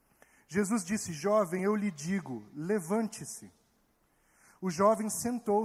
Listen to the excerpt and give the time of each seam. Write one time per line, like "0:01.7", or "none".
none